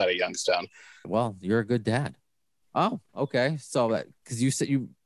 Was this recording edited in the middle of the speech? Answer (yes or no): yes